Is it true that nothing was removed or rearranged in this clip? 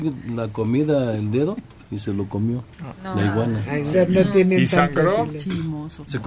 no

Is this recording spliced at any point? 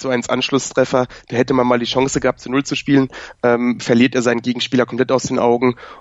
no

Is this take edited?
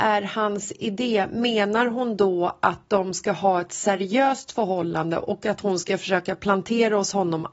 no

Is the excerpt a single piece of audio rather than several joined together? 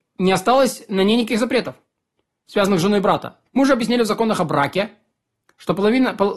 no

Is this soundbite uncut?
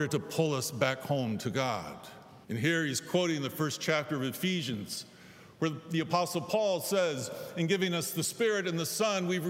no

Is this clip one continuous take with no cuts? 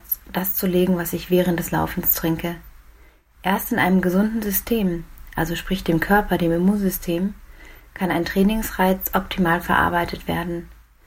yes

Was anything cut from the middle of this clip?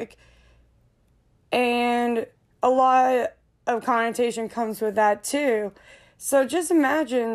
no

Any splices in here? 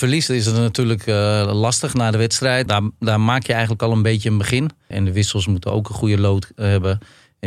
yes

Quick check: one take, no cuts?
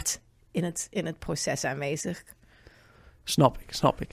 yes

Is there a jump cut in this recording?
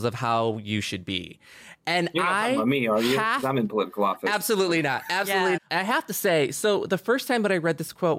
yes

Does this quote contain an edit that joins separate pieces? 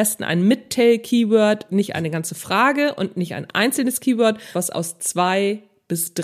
yes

